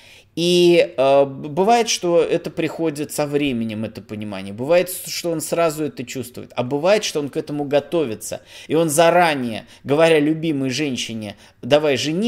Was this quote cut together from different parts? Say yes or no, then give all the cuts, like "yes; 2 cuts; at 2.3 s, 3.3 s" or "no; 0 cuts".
no; 0 cuts